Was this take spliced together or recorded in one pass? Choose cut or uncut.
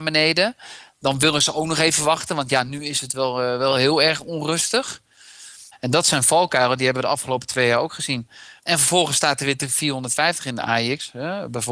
cut